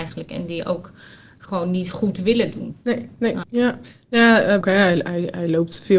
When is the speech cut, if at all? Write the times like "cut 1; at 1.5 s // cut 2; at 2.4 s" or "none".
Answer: cut 1; at 3.4 s // cut 2; at 4.6 s

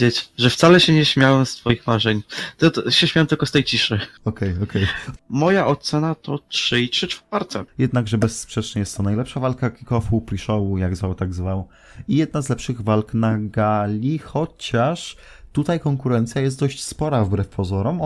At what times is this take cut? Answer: cut 1; at 5.2 s // cut 2; at 7.7 s

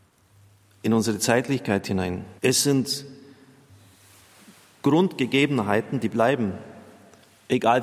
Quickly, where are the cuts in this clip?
cut 1; at 2.4 s

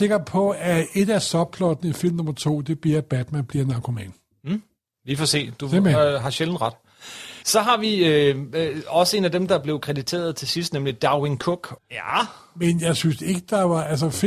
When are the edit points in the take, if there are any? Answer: cut 1; at 7.4 s // cut 2; at 11.8 s

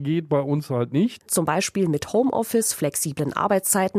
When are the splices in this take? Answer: cut 1; at 1.3 s

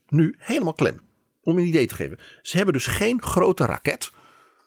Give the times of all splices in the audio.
none

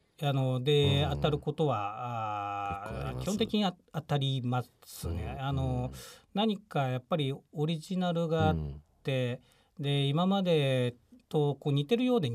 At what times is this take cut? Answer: none

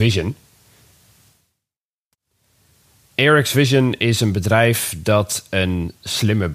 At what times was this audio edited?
none

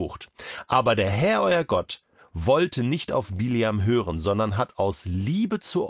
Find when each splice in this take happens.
none

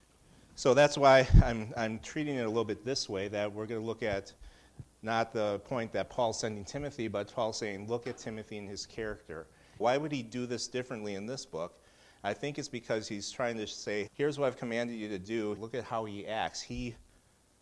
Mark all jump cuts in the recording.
cut 1; at 9.8 s // cut 2; at 14.1 s // cut 3; at 15.6 s

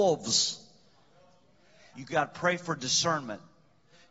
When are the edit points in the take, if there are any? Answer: cut 1; at 1.9 s

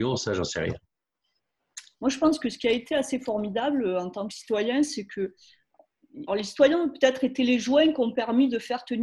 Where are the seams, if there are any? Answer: cut 1; at 1.9 s // cut 2; at 6.3 s

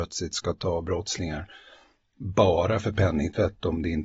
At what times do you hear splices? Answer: none

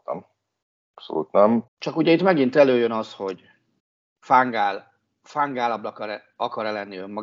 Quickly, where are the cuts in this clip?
cut 1; at 1.7 s

